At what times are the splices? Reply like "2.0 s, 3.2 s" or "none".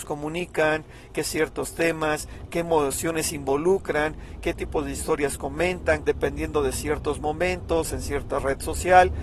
2.5 s, 6.0 s